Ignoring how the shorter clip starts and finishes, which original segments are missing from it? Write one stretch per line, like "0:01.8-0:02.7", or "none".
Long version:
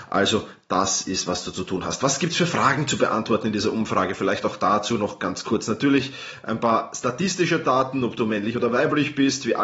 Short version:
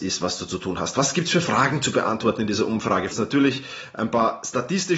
0:04.2-0:05.6